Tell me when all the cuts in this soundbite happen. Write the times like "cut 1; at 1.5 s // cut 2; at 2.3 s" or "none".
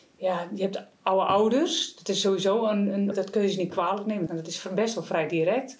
cut 1; at 3.1 s // cut 2; at 4.3 s

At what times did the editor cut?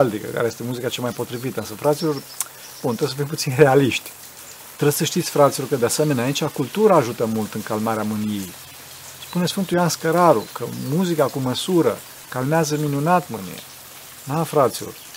cut 1; at 4.8 s

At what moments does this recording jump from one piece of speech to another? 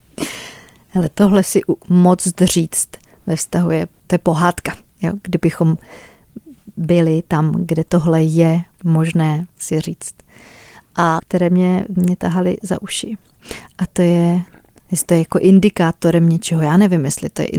cut 1; at 11.2 s

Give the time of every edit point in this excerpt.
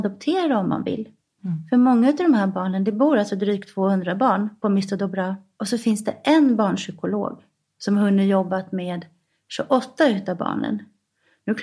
cut 1; at 1.4 s // cut 2; at 5.6 s

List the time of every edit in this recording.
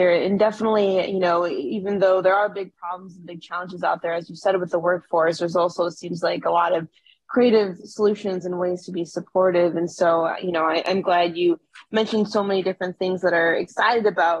none

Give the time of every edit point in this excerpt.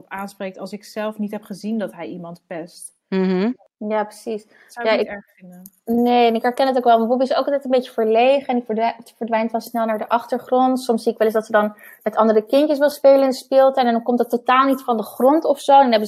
none

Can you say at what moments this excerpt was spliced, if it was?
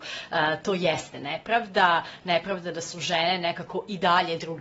none

